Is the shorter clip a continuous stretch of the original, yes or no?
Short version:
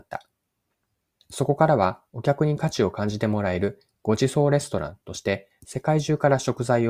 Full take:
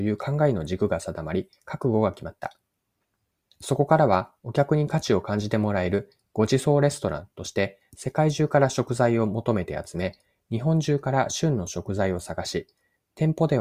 yes